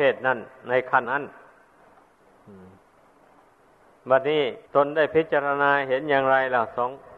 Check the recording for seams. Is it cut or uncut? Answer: cut